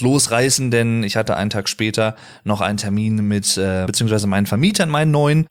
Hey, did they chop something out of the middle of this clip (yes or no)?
yes